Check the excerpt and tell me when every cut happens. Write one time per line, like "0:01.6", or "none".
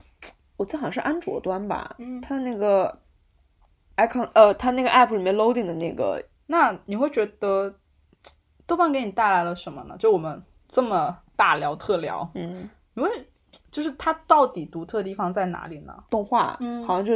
0:06.3
0:16.1